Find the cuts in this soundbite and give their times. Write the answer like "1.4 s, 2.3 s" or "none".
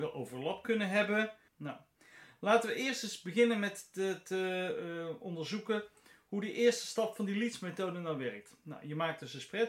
1.5 s